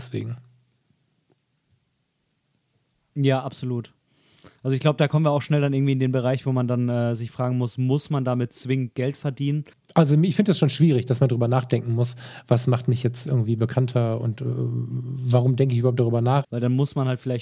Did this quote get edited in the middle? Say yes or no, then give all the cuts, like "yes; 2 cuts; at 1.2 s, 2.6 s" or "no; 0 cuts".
yes; 2 cuts; at 9.7 s, 16.4 s